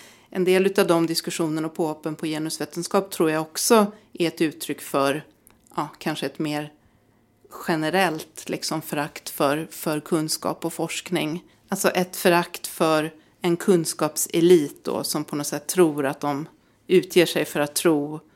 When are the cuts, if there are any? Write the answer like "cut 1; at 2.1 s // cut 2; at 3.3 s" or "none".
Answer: cut 1; at 11.5 s